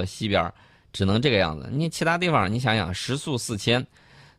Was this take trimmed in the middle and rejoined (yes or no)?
no